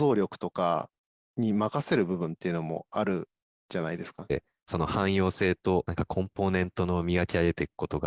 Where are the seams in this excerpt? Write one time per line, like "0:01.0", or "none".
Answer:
0:04.3